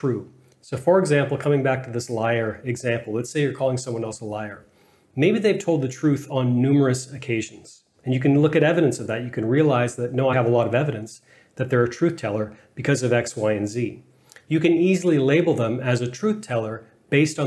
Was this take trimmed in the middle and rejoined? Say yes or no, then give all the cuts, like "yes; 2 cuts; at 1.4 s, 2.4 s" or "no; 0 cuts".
yes; 1 cut; at 10.3 s